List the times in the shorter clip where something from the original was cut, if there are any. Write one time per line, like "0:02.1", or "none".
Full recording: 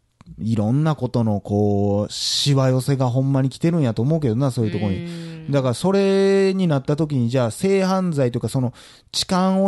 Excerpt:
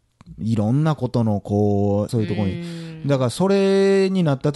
0:02.1